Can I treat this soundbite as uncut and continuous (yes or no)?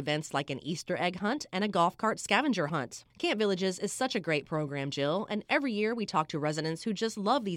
no